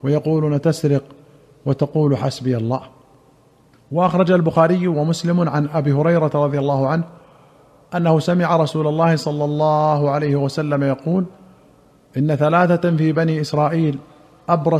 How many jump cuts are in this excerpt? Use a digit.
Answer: 0